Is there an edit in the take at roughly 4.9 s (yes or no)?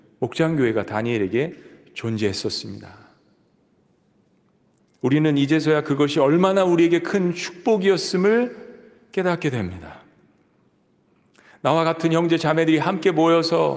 yes